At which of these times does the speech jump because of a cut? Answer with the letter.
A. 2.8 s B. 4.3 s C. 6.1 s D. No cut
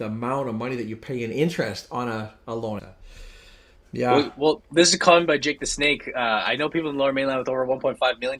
A